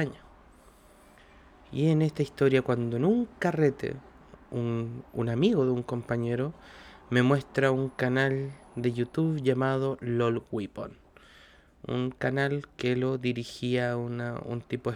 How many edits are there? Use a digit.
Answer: 1